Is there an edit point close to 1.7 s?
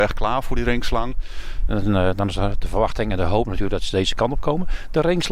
yes; 1 cut; at 1.7 s

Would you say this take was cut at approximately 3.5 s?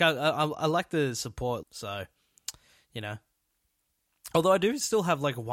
no; 1 cut; at 1.6 s

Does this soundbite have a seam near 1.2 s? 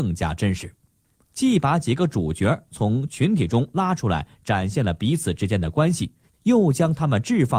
yes; 1 cut; at 1.2 s

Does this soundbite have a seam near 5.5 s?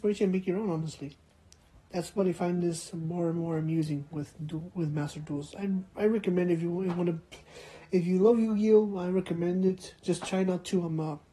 no; 0 cuts

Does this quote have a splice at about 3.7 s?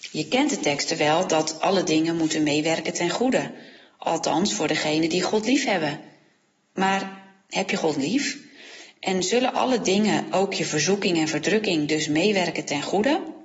no; 0 cuts

